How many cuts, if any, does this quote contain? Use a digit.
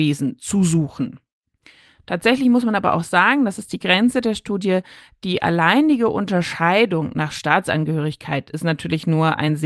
0